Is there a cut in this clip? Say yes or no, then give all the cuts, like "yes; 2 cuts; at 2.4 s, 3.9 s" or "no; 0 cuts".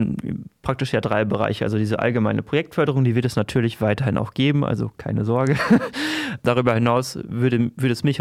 no; 0 cuts